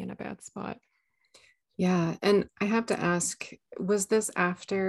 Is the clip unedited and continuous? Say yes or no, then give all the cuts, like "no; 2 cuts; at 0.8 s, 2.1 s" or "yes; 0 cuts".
yes; 0 cuts